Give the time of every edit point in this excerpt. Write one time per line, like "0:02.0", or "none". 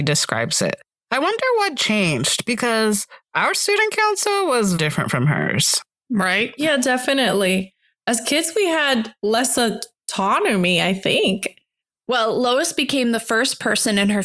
0:04.8